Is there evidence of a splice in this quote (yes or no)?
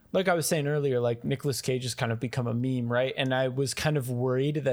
no